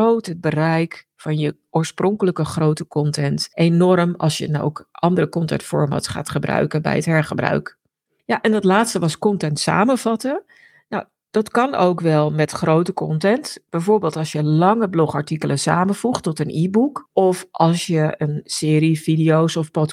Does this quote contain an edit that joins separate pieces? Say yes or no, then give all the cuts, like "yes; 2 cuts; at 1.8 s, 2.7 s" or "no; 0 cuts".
no; 0 cuts